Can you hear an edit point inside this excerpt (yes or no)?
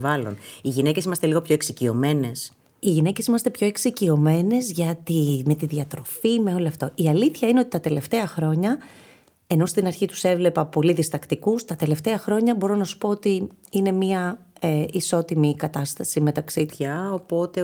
yes